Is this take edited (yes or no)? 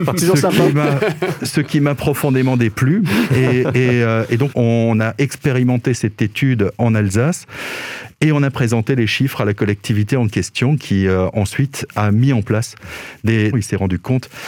yes